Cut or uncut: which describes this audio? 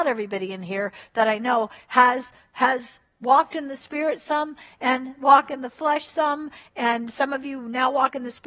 uncut